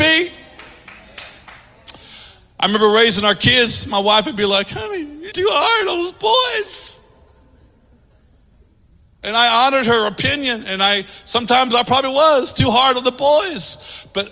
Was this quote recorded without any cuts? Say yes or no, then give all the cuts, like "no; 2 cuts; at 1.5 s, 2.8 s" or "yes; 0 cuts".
no; 1 cut; at 5.3 s